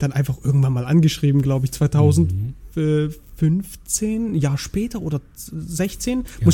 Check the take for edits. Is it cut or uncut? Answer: uncut